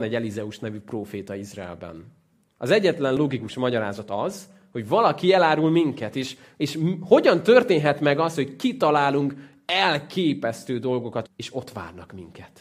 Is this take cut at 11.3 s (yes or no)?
yes